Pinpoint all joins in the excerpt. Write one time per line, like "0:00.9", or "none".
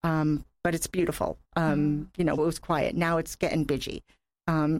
0:02.4